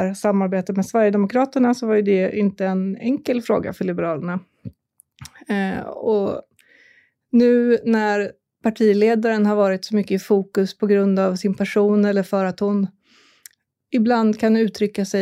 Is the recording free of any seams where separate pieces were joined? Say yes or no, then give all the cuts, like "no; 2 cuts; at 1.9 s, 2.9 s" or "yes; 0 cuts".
yes; 0 cuts